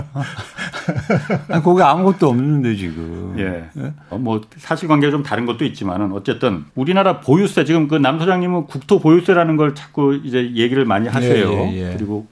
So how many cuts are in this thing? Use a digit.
2